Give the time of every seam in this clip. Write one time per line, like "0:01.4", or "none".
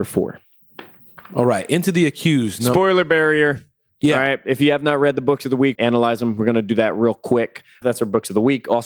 0:05.8
0:07.8